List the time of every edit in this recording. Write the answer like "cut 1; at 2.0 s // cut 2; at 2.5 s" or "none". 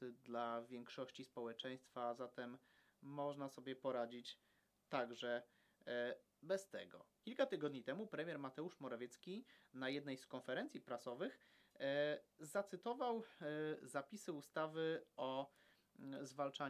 cut 1; at 7.2 s